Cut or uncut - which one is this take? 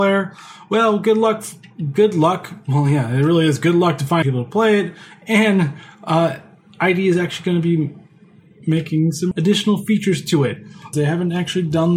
cut